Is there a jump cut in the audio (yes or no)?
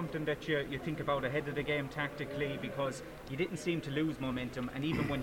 no